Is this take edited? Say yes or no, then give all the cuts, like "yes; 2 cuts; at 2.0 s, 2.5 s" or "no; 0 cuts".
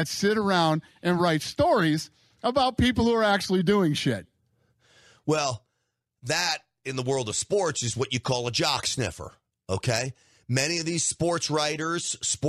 no; 0 cuts